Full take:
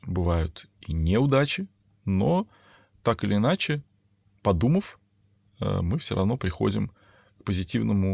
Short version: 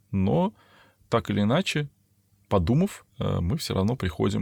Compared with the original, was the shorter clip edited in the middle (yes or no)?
yes